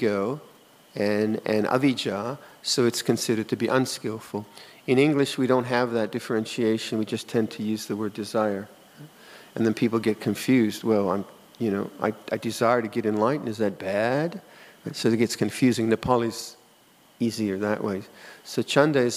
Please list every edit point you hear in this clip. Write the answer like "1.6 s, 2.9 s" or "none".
none